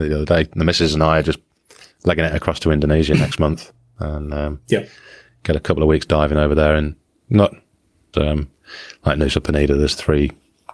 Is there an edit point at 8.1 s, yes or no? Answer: yes